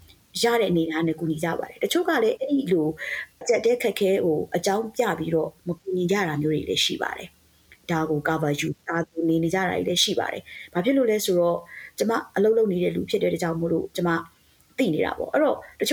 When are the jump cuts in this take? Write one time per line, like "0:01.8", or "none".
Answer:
0:03.4
0:08.8